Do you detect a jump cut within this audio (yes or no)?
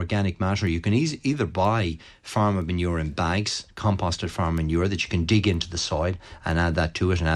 no